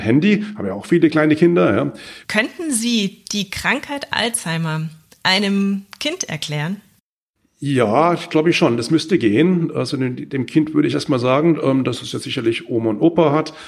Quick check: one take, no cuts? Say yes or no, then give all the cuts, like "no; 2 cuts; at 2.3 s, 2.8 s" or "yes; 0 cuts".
no; 1 cut; at 2.2 s